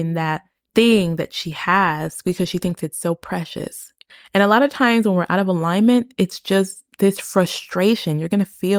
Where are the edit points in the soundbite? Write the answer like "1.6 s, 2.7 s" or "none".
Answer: none